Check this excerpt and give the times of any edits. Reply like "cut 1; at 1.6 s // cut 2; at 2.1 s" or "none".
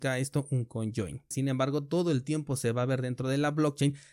cut 1; at 1.3 s